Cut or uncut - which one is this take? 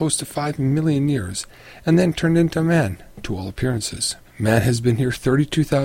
cut